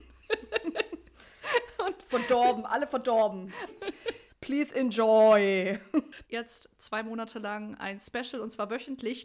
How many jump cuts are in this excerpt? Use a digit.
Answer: 2